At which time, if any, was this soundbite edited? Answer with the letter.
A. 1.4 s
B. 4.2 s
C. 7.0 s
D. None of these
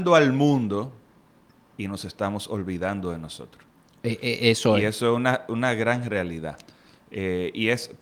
D